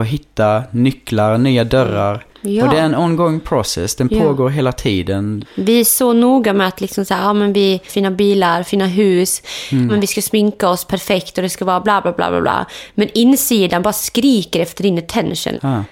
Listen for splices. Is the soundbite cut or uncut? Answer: cut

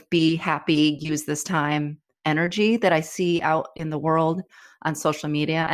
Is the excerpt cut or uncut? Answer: uncut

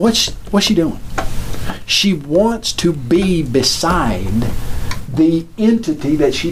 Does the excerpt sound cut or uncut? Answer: uncut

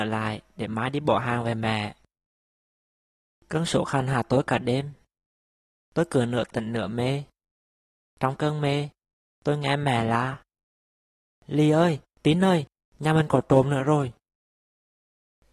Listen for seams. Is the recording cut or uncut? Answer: uncut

